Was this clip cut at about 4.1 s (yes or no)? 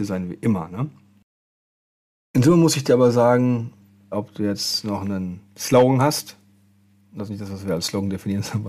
yes